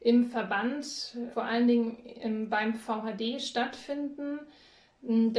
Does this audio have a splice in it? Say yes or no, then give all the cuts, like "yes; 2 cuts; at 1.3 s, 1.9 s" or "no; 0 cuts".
yes; 1 cut; at 1.3 s